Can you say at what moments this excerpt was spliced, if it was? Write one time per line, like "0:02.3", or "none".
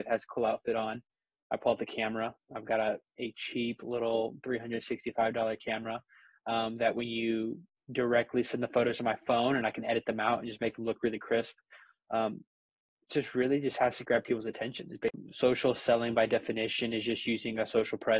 none